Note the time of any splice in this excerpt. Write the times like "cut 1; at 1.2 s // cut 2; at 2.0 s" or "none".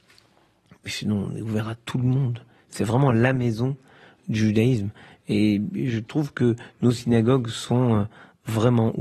none